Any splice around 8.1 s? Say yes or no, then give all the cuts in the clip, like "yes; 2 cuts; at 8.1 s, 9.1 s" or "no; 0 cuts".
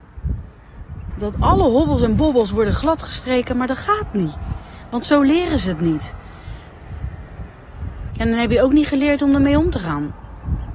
yes; 2 cuts; at 1.1 s, 8.1 s